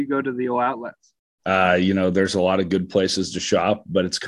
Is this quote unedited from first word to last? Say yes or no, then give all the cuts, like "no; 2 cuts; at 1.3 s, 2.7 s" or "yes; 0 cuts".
no; 1 cut; at 1.4 s